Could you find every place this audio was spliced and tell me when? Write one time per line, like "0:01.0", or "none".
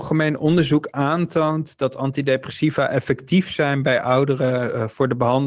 none